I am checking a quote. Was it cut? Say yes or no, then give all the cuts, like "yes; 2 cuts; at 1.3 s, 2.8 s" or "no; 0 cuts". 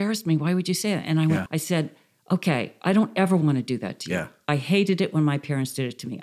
yes; 1 cut; at 1.5 s